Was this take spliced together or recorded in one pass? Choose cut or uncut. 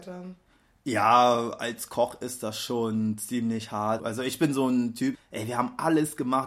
cut